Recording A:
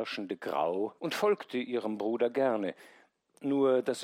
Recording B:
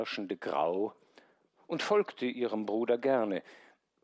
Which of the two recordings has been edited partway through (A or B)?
A